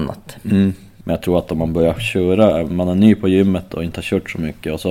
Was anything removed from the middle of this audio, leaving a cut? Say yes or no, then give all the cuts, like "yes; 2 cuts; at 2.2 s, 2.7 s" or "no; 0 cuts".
yes; 1 cut; at 1.0 s